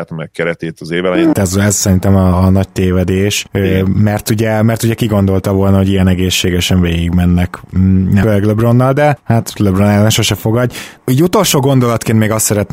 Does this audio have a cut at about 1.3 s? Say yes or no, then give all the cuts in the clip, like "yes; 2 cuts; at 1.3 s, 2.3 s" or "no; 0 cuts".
yes; 2 cuts; at 1.3 s, 8.2 s